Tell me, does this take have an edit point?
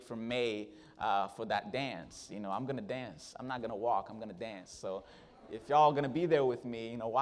no; 0 cuts

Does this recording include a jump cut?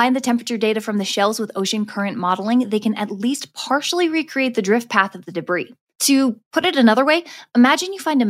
no; 0 cuts

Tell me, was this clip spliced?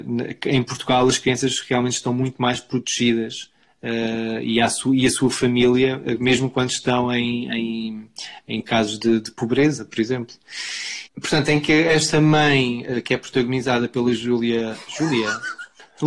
yes; 1 cut; at 11.1 s

